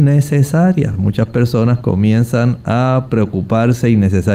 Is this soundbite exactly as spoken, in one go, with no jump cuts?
yes; 0 cuts

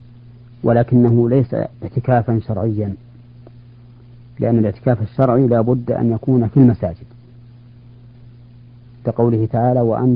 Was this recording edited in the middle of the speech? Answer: yes; 1 cut; at 1.7 s

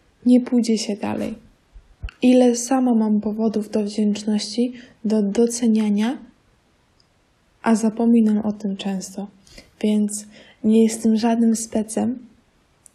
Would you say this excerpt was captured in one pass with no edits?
no; 1 cut; at 2.1 s

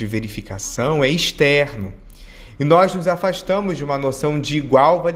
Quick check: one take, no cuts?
yes; 0 cuts

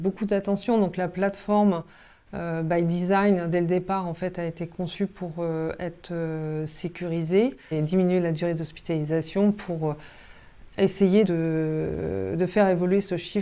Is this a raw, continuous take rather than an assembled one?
no; 2 cuts; at 7.7 s, 11.2 s

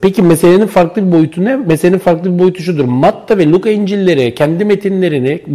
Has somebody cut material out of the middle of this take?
no; 0 cuts

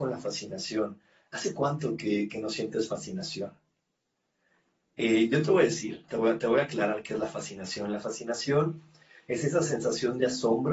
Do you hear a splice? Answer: no; 0 cuts

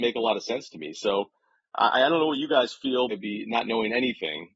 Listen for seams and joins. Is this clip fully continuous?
no; 1 cut; at 3.1 s

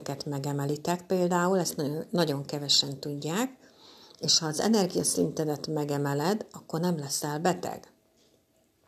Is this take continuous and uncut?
yes; 0 cuts

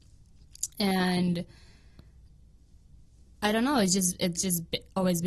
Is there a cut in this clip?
no; 0 cuts

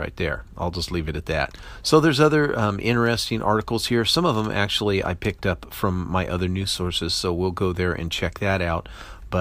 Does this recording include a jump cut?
no; 0 cuts

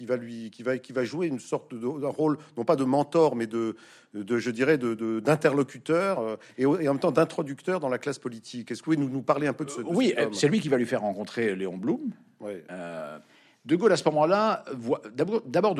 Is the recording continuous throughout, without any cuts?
yes; 0 cuts

